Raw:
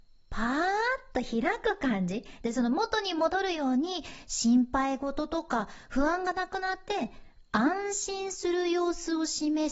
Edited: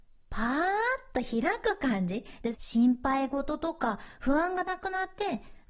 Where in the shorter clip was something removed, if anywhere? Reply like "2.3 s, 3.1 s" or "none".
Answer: 2.5 s